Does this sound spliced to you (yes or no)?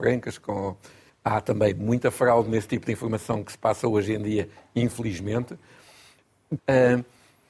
yes